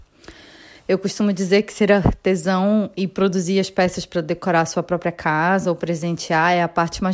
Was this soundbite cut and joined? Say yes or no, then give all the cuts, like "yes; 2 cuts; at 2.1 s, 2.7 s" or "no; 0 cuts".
no; 0 cuts